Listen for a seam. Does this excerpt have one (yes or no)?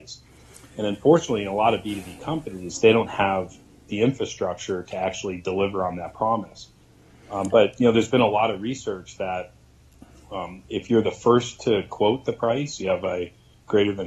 no